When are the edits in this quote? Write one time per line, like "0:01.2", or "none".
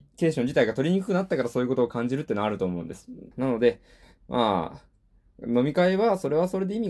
0:03.3

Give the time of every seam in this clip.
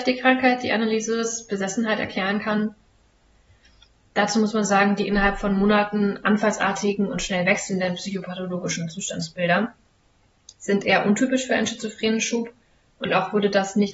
none

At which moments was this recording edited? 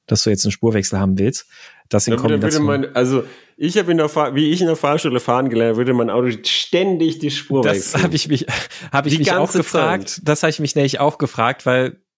none

